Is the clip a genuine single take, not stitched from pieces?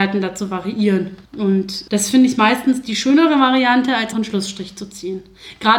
no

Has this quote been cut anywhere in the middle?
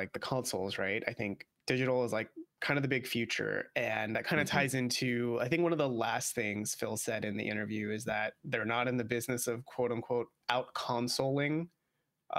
no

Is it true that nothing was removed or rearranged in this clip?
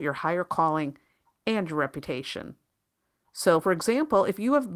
yes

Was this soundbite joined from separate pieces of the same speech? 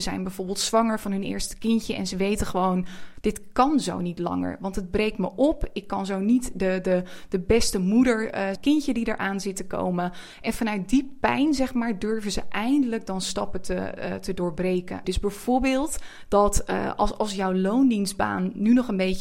yes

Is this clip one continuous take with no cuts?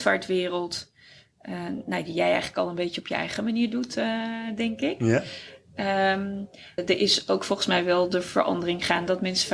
no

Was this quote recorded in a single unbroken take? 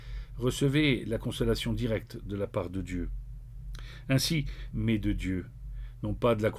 no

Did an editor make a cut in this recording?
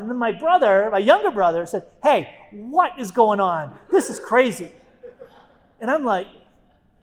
no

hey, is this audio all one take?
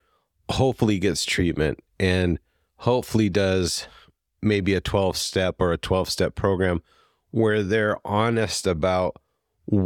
yes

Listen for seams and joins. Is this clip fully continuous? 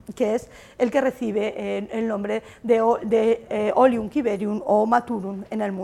yes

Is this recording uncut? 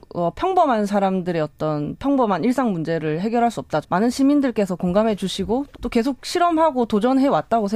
no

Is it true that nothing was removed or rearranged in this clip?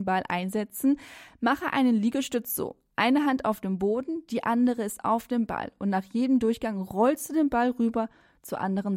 yes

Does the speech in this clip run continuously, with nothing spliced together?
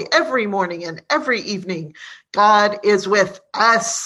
yes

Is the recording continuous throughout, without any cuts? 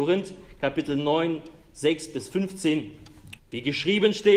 no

